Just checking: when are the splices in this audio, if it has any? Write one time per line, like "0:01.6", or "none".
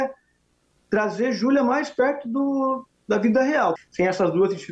0:03.8